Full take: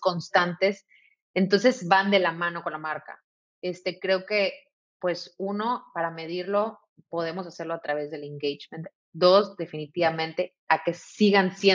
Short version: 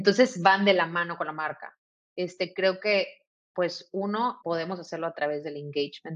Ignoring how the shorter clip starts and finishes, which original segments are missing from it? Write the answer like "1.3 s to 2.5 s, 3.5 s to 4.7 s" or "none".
5.9 s to 7.1 s